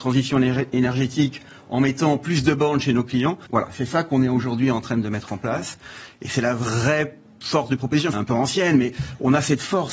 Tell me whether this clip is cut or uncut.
cut